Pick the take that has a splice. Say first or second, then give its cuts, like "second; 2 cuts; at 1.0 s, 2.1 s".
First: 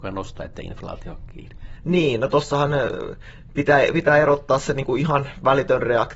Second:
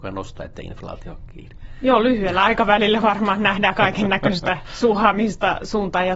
first; 1 cut; at 1.8 s